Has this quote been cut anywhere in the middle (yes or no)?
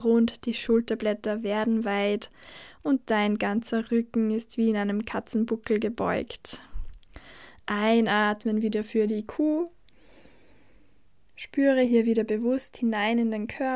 no